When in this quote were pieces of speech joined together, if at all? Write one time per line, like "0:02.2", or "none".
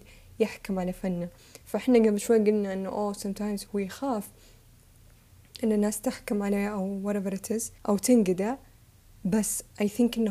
0:03.7
0:07.8

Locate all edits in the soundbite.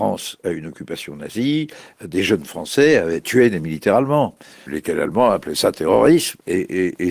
0:04.7

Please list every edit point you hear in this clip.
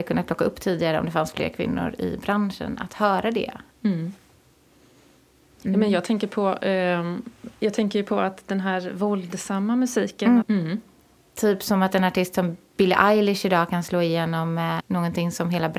0:10.4
0:14.8

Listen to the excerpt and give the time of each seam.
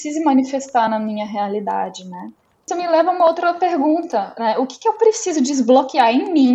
0:02.5

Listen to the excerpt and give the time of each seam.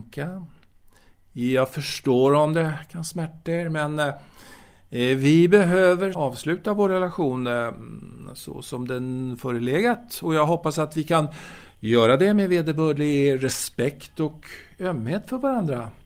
0:06.1

